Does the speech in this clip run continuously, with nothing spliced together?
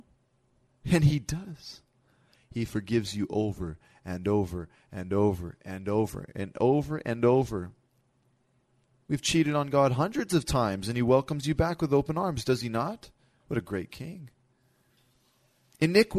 yes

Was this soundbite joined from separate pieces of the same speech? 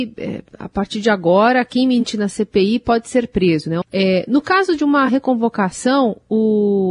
yes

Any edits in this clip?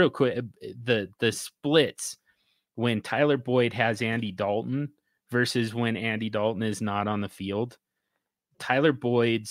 no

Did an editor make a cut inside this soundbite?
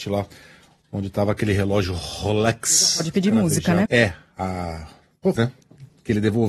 yes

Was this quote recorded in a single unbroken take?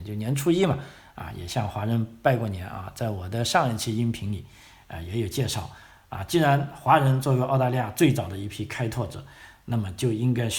yes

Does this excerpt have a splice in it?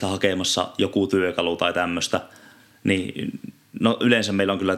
no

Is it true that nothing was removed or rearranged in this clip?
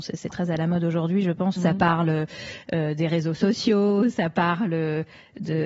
no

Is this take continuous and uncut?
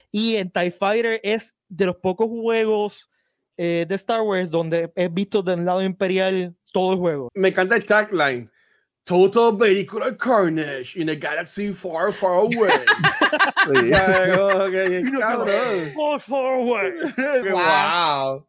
no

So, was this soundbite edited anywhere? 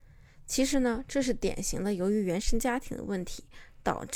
no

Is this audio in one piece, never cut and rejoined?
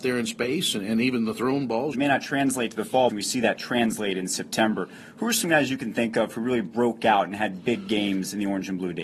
no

